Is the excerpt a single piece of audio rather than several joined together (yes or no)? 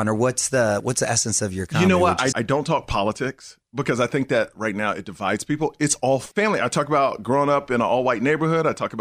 no